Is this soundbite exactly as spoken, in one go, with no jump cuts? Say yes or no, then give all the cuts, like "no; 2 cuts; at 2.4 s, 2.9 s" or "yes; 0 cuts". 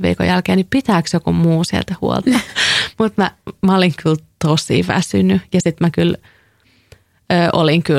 no; 1 cut; at 2.2 s